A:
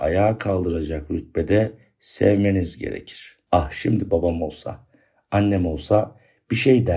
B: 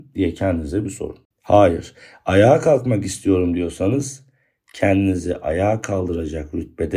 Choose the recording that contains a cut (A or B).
B